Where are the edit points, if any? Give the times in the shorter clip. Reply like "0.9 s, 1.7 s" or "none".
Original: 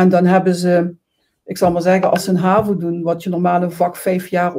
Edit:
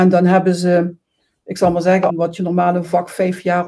2.1 s

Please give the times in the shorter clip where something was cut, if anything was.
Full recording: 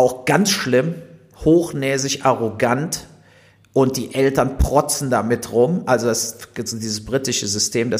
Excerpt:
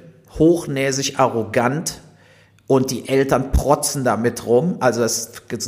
none

